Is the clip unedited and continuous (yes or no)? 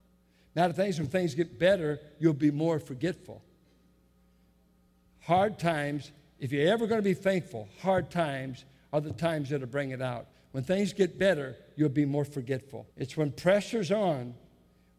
no